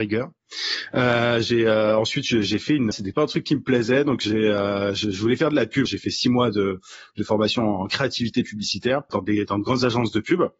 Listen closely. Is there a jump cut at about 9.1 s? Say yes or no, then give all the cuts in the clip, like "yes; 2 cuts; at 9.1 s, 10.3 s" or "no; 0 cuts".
yes; 3 cuts; at 2.9 s, 5.9 s, 9.1 s